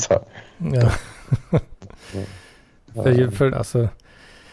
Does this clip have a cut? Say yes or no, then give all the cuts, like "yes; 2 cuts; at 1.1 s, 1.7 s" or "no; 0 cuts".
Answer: yes; 1 cut; at 3.5 s